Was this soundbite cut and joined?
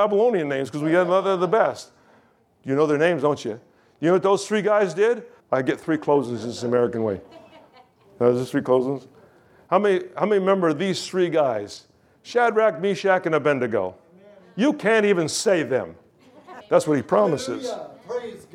yes; 2 cuts; at 5.4 s, 16.6 s

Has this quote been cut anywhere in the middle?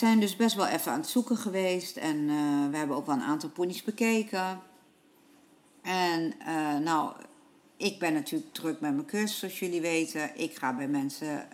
no; 0 cuts

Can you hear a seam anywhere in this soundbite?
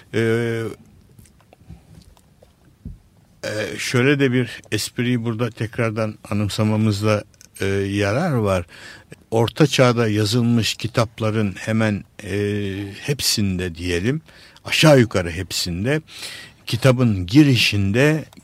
yes; 1 cut; at 9.1 s

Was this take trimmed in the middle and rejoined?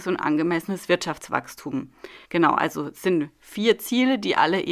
yes; 1 cut; at 2.2 s

